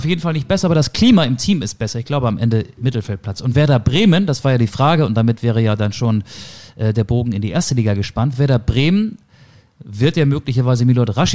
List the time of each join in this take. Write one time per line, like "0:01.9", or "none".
none